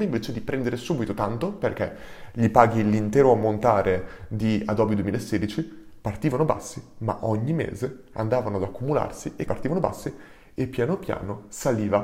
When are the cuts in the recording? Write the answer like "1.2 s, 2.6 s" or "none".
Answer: 9.5 s